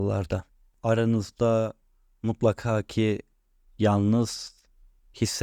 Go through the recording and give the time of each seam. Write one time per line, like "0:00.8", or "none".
none